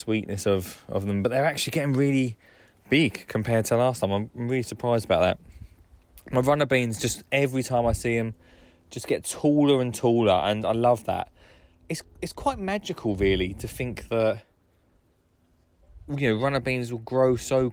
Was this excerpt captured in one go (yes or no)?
yes